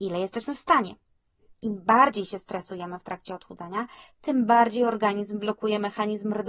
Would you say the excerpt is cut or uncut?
cut